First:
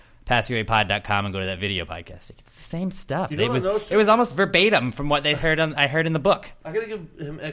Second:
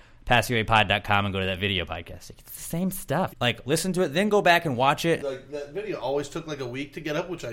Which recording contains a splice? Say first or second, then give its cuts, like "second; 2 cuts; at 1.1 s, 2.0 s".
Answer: second; 2 cuts; at 3.3 s, 5.2 s